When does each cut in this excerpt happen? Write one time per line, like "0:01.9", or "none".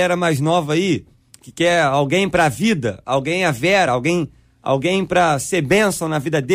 none